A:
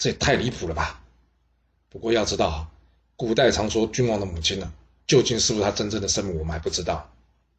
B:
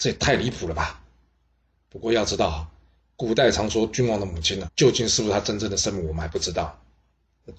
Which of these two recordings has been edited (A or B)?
B